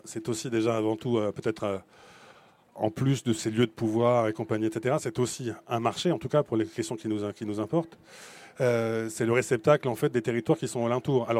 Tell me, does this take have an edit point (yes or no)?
no